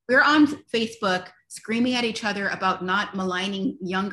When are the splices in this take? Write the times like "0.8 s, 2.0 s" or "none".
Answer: none